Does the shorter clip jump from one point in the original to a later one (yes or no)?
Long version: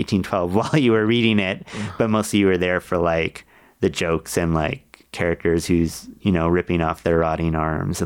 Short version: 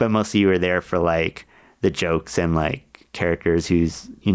no